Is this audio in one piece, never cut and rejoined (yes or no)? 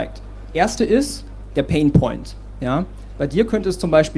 no